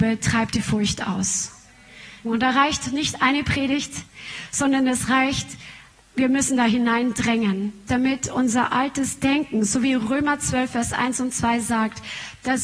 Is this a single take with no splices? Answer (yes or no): no